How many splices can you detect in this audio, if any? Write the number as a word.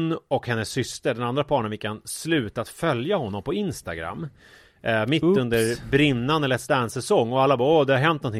zero